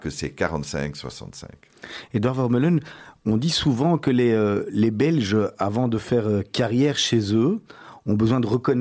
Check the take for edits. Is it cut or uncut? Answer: uncut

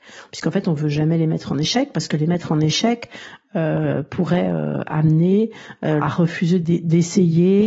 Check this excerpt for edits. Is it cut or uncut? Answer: cut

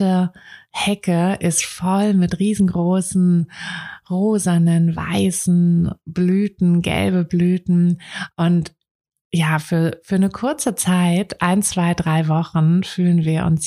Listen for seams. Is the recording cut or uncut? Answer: uncut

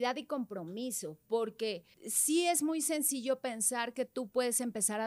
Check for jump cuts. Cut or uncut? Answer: cut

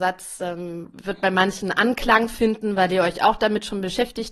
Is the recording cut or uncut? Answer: uncut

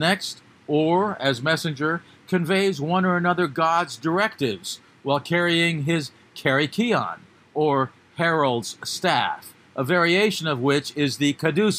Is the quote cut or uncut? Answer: uncut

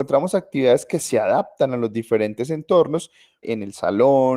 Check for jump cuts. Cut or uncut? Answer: cut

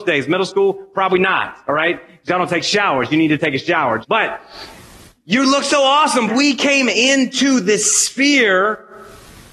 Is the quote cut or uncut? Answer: cut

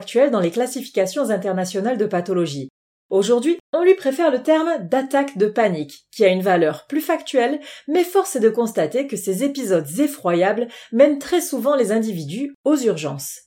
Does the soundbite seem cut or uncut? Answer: cut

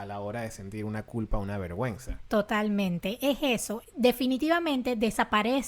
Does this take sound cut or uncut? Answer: cut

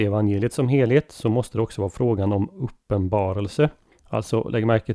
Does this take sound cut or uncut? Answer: cut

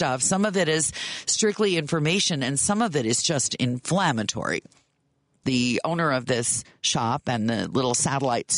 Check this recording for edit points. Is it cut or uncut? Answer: cut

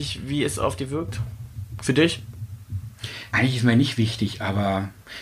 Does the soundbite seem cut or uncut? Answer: cut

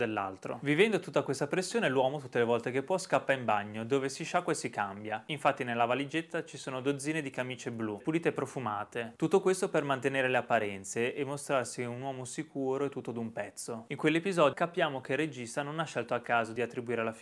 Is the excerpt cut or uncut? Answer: cut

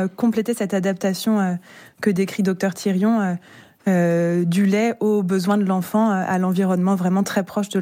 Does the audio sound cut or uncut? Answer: uncut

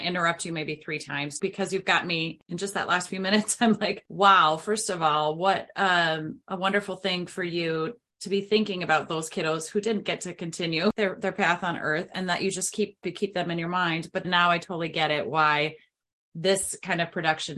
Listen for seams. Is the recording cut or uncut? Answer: cut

